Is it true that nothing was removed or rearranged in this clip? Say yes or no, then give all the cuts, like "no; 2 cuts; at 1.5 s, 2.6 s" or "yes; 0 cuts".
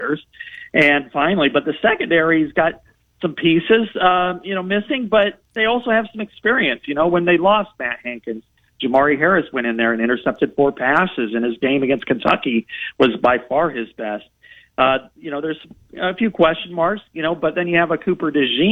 yes; 0 cuts